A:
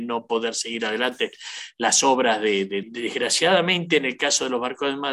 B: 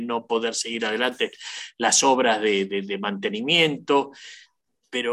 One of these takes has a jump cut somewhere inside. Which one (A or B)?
A